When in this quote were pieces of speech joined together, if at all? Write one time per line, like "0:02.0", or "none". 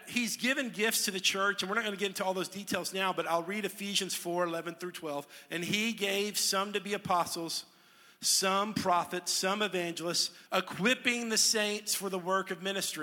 0:10.5